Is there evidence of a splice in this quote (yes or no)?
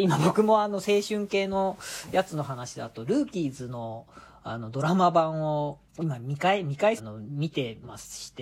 yes